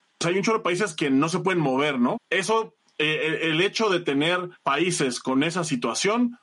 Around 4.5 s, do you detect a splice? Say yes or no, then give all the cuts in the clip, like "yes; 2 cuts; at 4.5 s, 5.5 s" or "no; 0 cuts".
yes; 2 cuts; at 2.1 s, 4.5 s